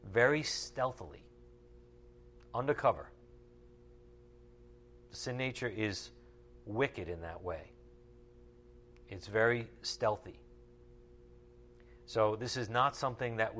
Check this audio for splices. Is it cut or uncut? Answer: uncut